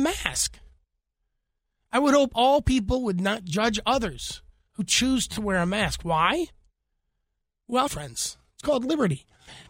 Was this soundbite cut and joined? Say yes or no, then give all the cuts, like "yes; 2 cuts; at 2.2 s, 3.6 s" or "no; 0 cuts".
yes; 1 cut; at 7.9 s